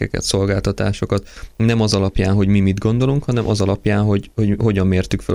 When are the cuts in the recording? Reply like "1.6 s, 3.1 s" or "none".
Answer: none